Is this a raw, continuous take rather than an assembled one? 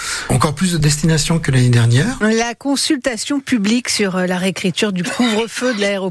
no; 1 cut; at 2.2 s

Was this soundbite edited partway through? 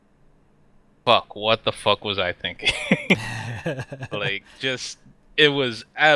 no; 0 cuts

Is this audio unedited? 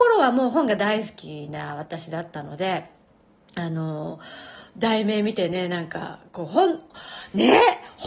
yes; 0 cuts

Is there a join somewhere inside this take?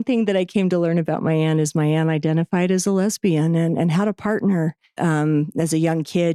yes; 1 cut; at 5.0 s

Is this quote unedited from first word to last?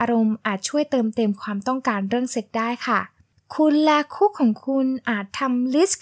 yes; 0 cuts

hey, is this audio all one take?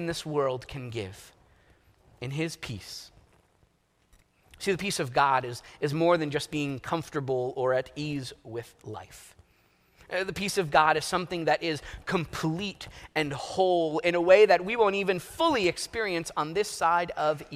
yes; 0 cuts

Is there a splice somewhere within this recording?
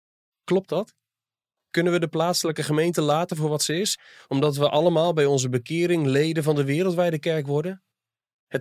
no; 0 cuts

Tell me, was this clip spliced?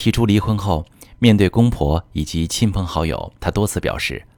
no; 0 cuts

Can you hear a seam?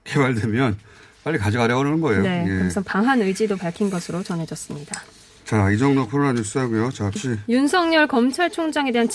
yes; 1 cut; at 7.2 s

